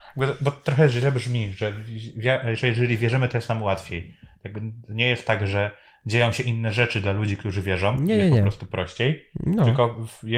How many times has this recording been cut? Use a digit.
0